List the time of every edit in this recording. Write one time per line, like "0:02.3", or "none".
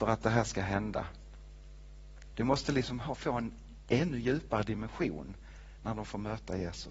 0:02.3